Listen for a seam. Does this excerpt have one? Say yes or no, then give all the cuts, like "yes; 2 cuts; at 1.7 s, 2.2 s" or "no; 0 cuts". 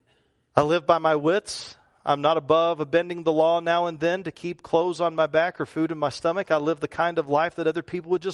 no; 0 cuts